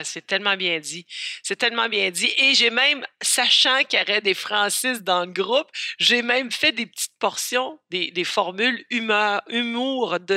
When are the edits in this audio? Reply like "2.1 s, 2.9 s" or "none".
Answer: none

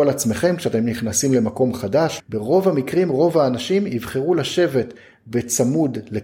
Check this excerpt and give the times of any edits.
2.2 s

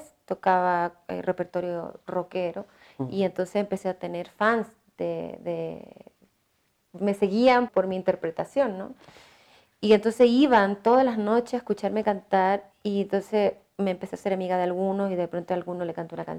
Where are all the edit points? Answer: 7.7 s

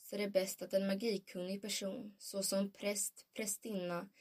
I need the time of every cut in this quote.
none

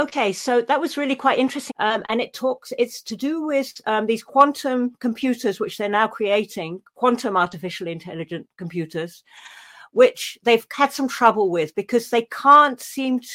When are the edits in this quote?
1.7 s

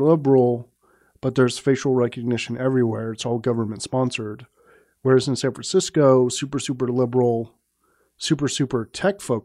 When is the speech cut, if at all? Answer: none

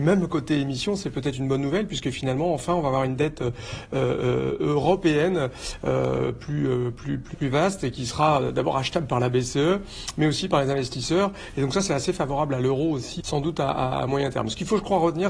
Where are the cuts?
7.3 s, 13.2 s

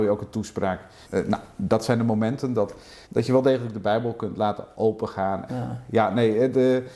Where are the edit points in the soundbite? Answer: 1.0 s, 3.0 s, 5.5 s

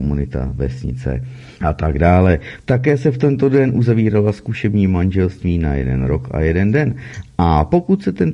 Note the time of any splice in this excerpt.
1.6 s, 2.6 s

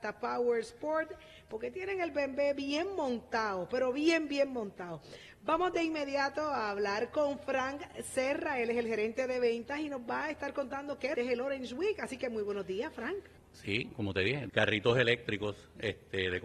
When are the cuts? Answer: 11.1 s, 13.4 s, 14.5 s

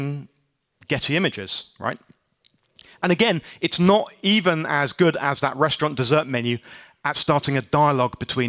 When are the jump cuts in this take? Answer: none

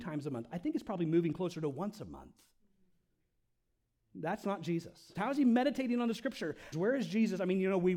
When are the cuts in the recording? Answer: 5.1 s, 6.7 s

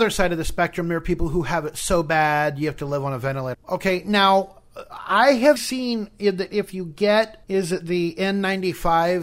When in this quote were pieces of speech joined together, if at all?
3.5 s, 5.6 s, 7.4 s

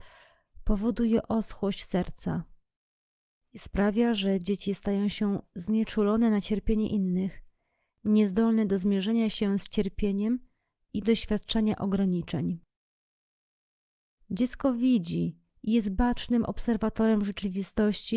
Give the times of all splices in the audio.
none

